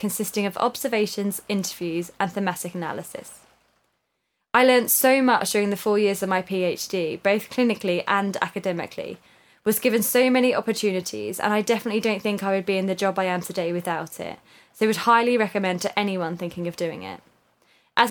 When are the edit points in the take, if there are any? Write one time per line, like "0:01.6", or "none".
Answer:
none